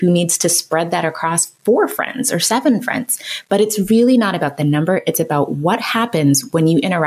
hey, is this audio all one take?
yes; 0 cuts

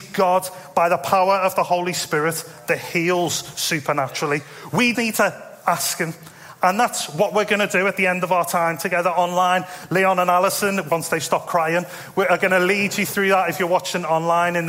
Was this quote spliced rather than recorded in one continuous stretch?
yes; 1 cut; at 4.9 s

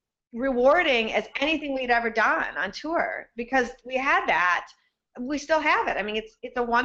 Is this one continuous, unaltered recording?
yes; 0 cuts

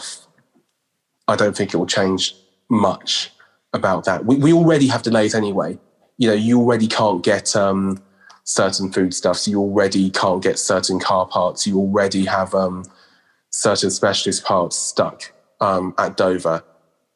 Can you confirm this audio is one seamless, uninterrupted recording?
yes; 0 cuts

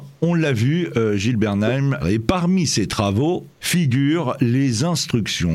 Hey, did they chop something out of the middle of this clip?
yes; 2 cuts; at 2.0 s, 3.6 s

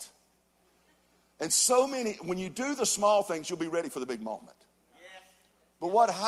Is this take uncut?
yes; 0 cuts

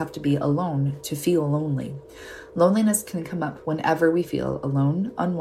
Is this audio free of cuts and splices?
yes; 0 cuts

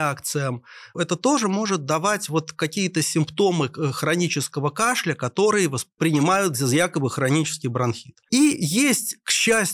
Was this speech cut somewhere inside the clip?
yes; 1 cut; at 0.9 s

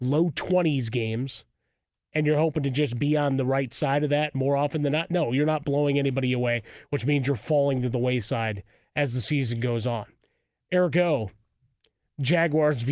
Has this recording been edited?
no; 0 cuts

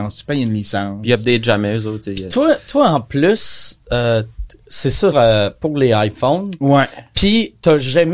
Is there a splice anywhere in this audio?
yes; 1 cut; at 5.1 s

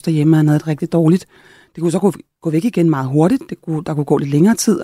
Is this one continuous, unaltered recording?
yes; 0 cuts

